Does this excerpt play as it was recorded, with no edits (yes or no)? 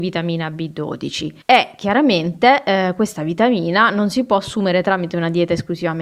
no